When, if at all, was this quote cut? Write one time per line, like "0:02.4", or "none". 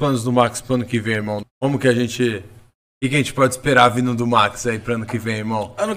0:01.4